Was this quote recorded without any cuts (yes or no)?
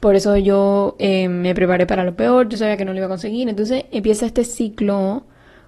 yes